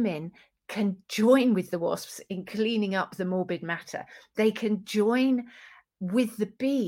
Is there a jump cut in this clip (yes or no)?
no